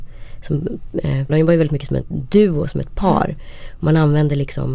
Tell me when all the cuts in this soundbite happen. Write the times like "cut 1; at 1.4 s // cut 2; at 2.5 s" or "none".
cut 1; at 1.3 s